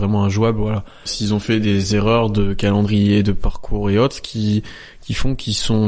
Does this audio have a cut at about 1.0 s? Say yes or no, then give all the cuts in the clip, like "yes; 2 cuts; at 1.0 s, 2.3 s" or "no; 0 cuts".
yes; 1 cut; at 1.0 s